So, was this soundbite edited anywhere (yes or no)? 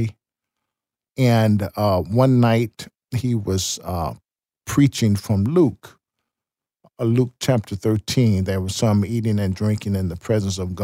no